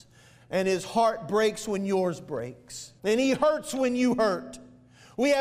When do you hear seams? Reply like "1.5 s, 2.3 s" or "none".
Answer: 3.0 s